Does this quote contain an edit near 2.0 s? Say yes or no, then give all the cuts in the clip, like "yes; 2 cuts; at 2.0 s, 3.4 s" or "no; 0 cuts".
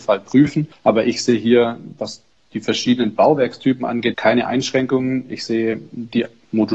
no; 1 cut; at 4.1 s